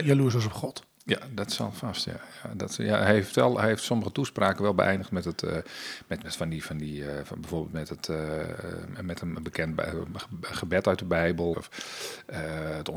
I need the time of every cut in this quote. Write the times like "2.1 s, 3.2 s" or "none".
6.2 s, 11.5 s